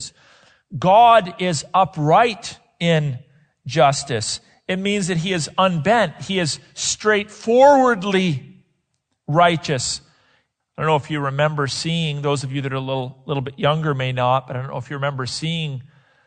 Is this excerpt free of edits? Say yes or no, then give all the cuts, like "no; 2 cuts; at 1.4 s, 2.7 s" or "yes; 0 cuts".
no; 1 cut; at 10.6 s